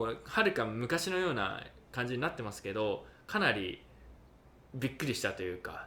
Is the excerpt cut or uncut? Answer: uncut